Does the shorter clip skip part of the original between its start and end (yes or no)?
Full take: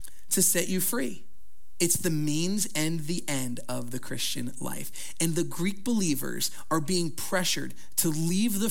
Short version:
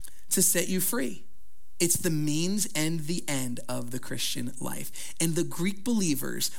no